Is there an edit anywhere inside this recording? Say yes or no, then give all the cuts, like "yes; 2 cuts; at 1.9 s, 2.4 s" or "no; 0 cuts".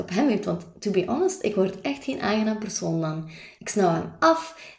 no; 0 cuts